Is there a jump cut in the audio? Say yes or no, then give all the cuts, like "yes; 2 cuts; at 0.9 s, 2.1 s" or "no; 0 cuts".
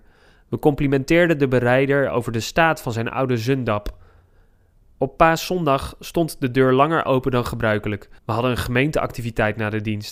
yes; 2 cuts; at 4.8 s, 8.2 s